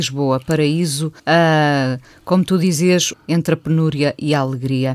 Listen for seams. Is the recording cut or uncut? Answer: cut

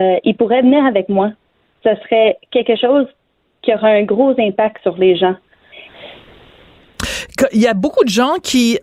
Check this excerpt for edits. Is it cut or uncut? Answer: uncut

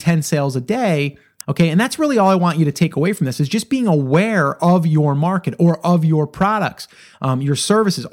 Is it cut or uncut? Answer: cut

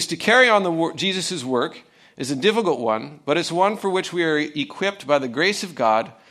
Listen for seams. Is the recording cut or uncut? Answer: uncut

